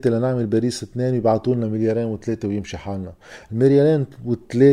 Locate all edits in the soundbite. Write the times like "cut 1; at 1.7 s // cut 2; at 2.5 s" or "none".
none